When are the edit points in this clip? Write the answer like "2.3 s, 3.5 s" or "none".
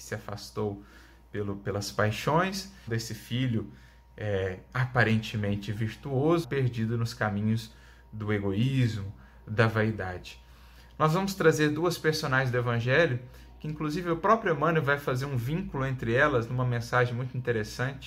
2.9 s, 6.4 s